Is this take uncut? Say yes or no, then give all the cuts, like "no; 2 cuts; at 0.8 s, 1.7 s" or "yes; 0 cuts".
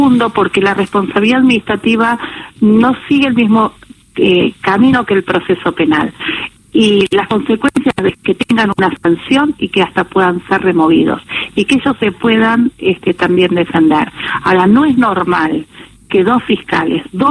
yes; 0 cuts